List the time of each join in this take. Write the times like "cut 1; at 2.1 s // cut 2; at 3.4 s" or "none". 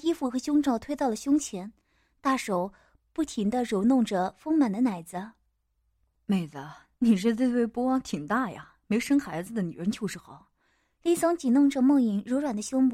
none